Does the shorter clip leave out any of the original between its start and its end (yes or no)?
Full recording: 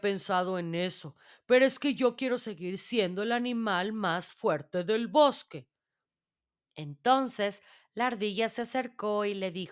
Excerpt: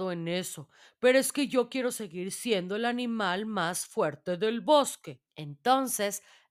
yes